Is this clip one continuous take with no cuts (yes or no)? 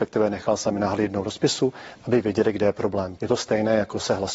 no